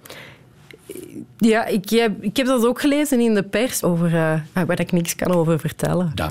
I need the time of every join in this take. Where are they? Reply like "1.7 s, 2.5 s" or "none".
3.8 s